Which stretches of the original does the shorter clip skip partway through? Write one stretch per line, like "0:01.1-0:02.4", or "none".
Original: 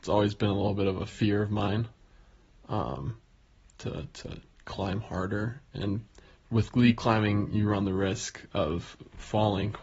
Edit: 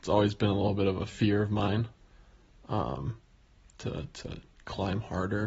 none